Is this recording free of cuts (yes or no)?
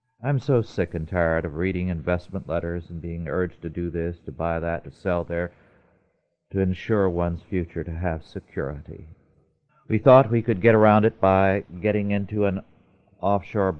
no